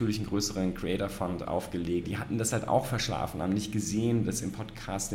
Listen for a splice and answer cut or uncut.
cut